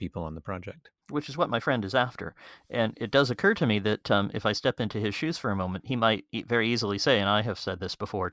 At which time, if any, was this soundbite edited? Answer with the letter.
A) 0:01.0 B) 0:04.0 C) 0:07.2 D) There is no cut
A